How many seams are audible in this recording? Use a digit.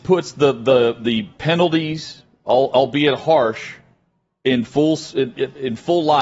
0